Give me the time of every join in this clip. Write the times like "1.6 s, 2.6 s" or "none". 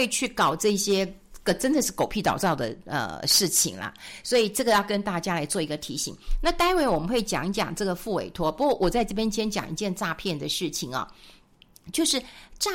none